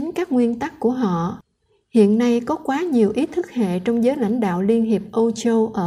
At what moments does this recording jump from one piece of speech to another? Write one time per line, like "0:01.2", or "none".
none